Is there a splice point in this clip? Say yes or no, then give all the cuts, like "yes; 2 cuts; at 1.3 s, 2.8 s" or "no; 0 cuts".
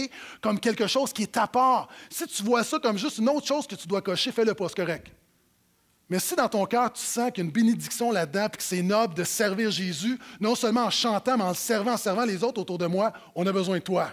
no; 0 cuts